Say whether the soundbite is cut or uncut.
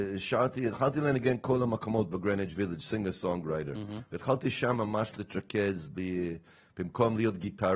uncut